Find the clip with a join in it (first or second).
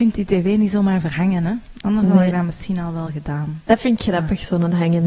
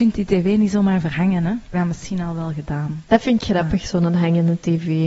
second